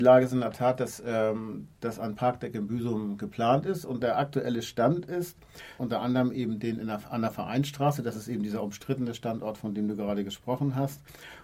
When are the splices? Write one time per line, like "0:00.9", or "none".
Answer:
0:05.8

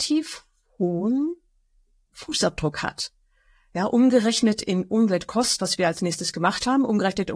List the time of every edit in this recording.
0:05.6

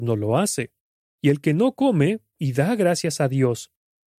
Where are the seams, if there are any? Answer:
0:01.0
0:02.3

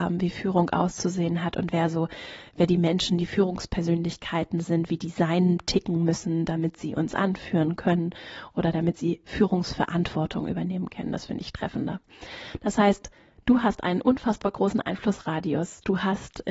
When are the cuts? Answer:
none

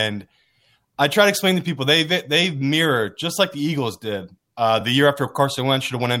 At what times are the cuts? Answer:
none

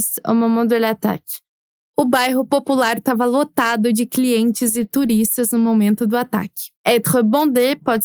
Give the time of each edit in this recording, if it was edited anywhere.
0:06.8

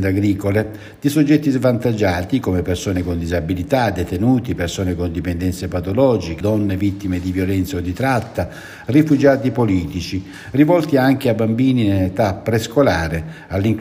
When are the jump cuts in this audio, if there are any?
0:06.4

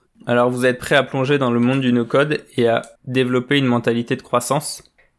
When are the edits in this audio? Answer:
0:03.0

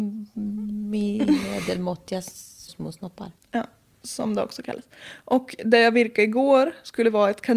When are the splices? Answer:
0:02.7

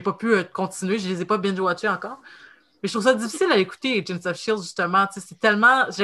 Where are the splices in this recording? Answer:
none

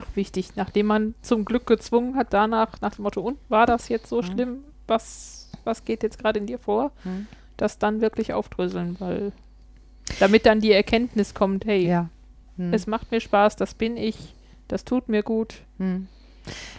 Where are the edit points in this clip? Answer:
none

